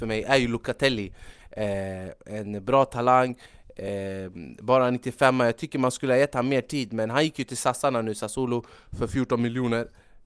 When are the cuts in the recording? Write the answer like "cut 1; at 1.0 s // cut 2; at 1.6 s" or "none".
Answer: none